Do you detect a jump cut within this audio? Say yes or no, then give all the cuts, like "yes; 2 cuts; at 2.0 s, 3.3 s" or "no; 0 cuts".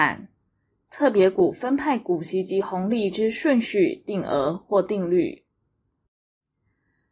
no; 0 cuts